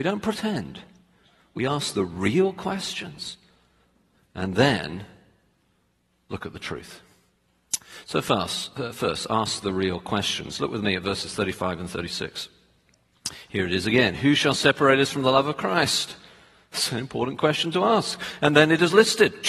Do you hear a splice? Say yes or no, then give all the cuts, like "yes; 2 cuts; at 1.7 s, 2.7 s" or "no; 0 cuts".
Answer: no; 0 cuts